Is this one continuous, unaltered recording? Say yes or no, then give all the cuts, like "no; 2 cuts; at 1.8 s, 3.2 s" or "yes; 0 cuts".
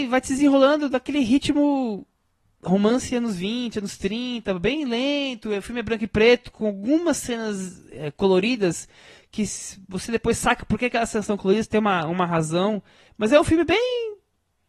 no; 1 cut; at 13.1 s